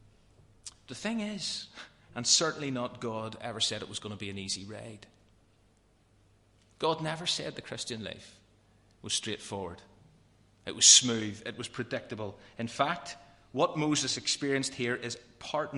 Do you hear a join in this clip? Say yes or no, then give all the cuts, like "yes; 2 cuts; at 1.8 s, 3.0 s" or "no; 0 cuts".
yes; 1 cut; at 2.1 s